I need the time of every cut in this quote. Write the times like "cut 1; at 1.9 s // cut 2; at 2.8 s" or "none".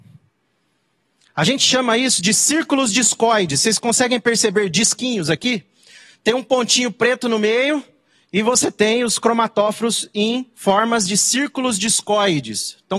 none